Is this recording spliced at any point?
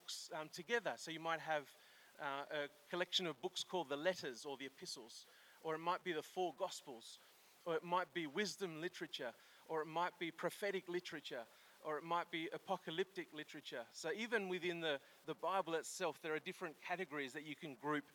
no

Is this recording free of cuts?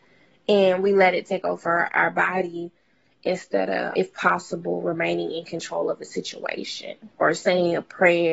no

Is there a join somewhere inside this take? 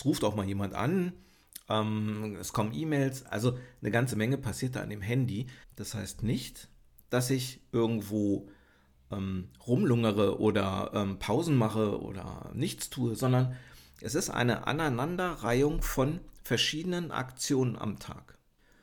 yes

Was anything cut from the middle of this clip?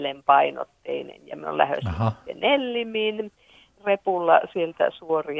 no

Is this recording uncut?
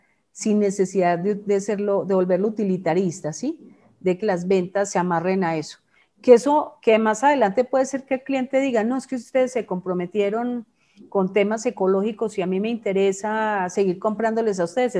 no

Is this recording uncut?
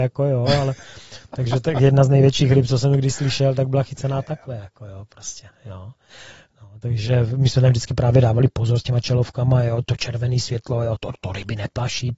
yes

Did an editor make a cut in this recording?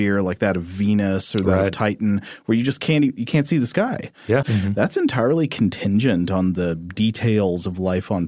yes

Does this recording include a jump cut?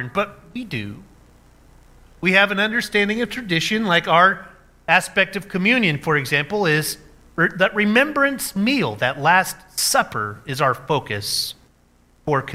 no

